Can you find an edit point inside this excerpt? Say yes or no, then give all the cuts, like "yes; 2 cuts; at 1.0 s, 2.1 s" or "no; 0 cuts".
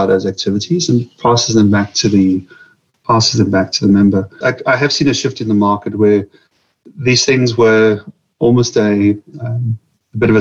yes; 1 cut; at 4.4 s